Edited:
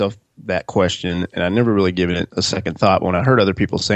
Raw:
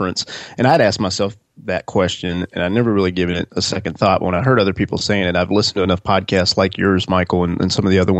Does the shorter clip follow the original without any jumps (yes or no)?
yes